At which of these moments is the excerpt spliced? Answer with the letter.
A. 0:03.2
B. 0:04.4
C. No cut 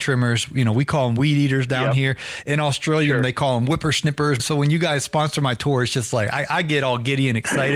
B